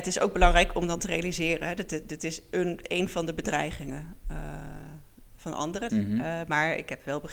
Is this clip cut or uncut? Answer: cut